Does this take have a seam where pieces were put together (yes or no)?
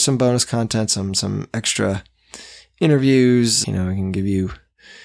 yes